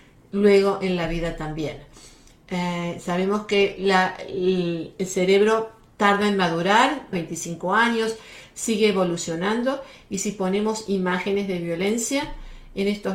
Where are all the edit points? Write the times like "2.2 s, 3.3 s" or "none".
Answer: 7.1 s